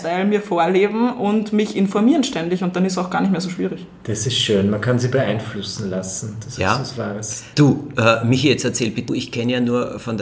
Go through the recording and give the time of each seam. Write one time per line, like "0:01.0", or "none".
0:07.5
0:09.1